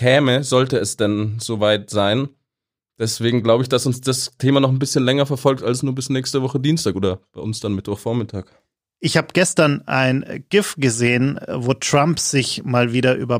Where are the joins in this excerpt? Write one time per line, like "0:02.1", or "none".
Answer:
none

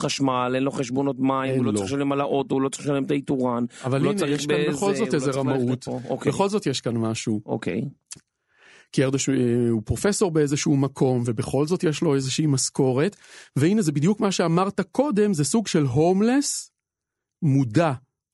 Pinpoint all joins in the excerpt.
0:08.2

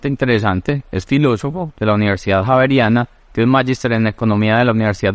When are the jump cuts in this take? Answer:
none

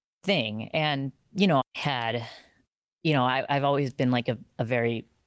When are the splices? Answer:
0:01.6

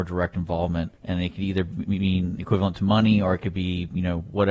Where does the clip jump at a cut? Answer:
0:01.0

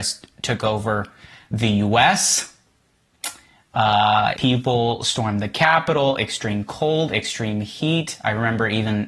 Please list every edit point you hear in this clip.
0:04.4

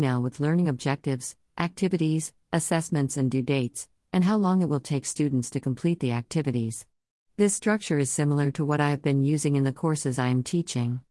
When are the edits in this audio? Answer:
0:07.2

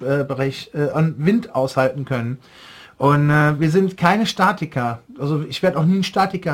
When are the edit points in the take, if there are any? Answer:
0:00.9

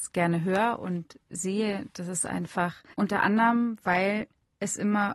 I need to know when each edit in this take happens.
0:02.9

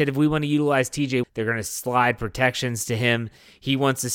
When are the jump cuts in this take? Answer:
0:01.2

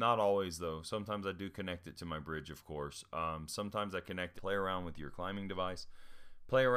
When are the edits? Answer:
0:04.4

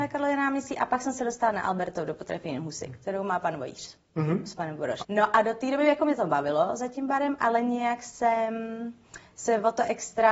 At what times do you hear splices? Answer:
0:05.0

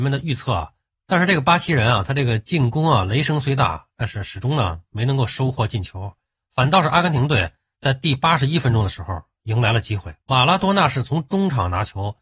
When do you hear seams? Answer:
0:00.9
0:10.2

